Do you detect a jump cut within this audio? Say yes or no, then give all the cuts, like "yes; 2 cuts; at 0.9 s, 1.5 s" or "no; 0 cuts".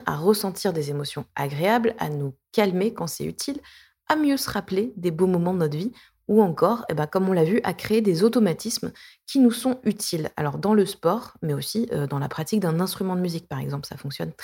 no; 0 cuts